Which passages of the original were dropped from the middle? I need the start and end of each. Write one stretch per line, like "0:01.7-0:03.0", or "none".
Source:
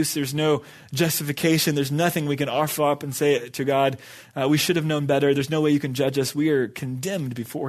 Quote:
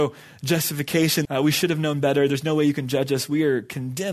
0:01.7-0:04.3